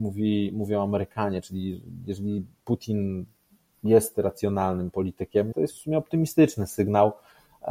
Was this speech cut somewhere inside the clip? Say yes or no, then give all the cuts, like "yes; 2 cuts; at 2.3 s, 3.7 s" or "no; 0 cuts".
yes; 1 cut; at 5.5 s